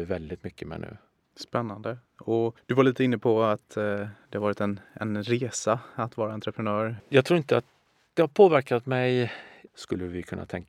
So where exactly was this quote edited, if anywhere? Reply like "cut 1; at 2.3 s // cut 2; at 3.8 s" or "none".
cut 1; at 7.0 s // cut 2; at 9.7 s

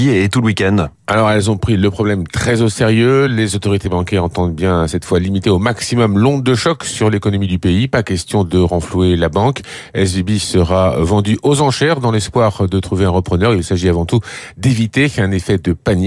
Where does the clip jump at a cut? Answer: none

